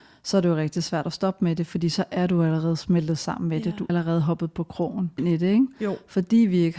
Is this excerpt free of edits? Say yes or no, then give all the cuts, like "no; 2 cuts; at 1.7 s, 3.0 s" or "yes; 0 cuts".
no; 2 cuts; at 3.9 s, 5.2 s